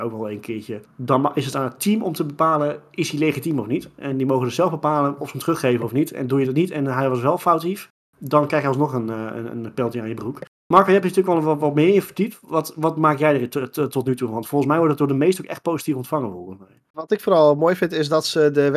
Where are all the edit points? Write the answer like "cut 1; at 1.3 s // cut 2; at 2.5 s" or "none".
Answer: none